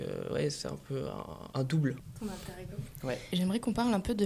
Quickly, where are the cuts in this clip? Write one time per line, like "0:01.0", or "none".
none